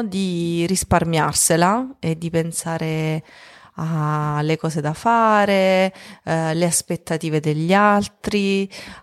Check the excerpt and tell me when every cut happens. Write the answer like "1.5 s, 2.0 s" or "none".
none